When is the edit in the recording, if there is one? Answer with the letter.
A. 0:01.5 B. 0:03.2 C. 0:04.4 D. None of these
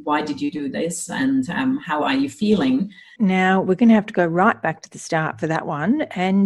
B